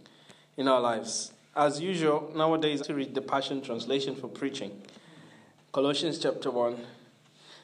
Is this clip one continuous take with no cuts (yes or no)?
no